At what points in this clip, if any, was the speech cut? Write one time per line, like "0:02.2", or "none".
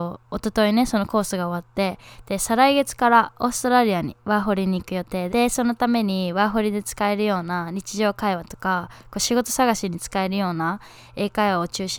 0:05.3